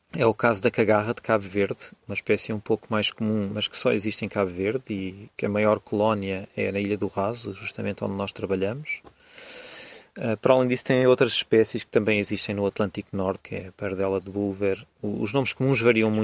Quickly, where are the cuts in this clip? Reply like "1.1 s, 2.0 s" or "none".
13.4 s